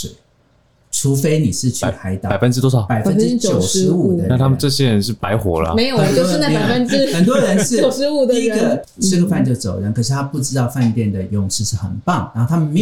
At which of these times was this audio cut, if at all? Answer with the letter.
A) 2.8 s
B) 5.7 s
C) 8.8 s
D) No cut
C